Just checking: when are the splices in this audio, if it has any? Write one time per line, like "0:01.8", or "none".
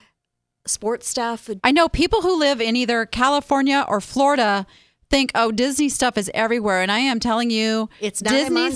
0:01.6